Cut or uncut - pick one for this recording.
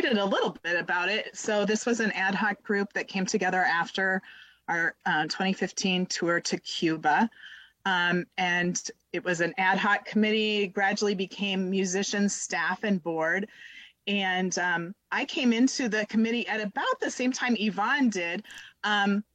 cut